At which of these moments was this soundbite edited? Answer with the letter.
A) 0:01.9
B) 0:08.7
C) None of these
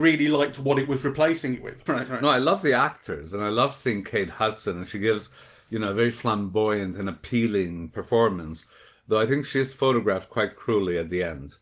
A